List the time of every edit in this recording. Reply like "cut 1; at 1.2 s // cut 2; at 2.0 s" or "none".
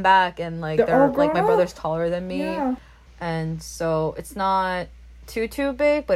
cut 1; at 3.0 s